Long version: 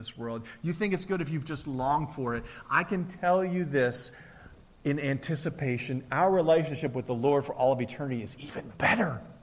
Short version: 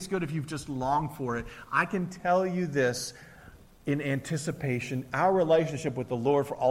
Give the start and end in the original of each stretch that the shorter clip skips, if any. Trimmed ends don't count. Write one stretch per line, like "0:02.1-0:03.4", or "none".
none